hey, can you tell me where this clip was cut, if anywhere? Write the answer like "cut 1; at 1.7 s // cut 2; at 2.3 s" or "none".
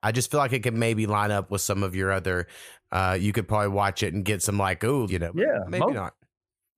cut 1; at 5.1 s